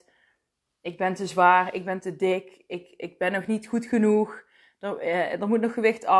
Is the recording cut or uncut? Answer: uncut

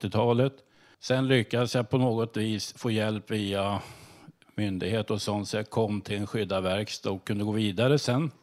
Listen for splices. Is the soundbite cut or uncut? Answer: cut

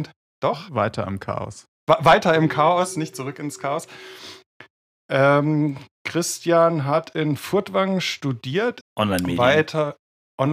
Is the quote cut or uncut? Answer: cut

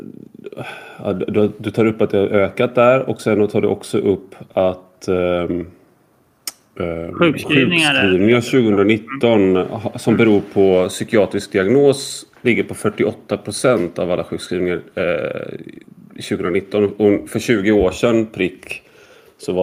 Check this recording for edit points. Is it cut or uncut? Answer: uncut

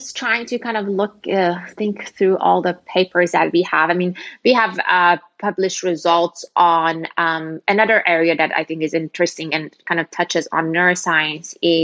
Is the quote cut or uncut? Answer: uncut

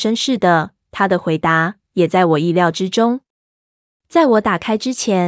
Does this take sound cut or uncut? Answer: uncut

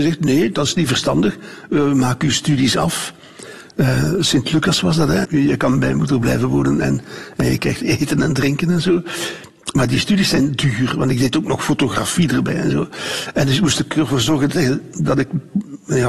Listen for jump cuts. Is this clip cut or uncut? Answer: cut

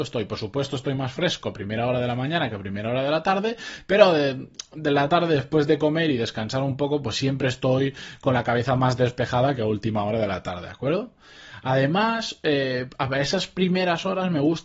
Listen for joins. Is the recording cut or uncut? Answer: uncut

